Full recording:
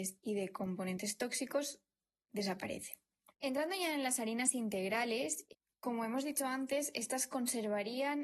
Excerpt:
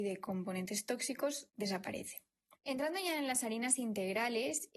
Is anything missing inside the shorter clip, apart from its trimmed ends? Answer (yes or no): yes